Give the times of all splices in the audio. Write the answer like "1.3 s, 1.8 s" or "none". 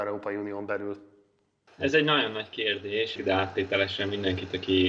1.7 s, 3.2 s